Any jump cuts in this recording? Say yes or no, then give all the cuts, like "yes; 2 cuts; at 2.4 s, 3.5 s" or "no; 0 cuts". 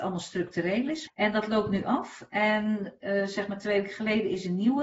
yes; 1 cut; at 1.1 s